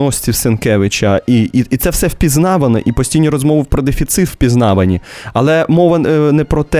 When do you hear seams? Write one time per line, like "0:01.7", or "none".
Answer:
none

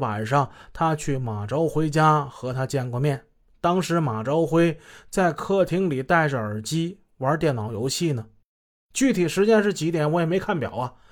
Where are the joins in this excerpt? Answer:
none

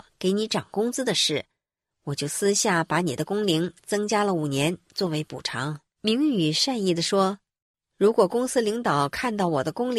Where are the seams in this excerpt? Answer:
0:01.8
0:06.0

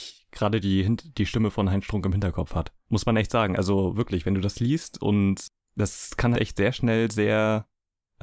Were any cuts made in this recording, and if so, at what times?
0:02.8
0:06.3

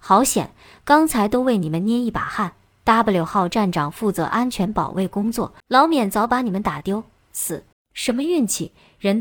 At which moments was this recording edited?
0:05.6
0:07.7

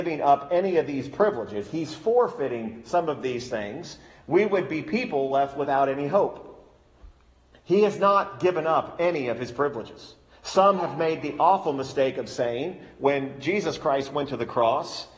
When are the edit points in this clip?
none

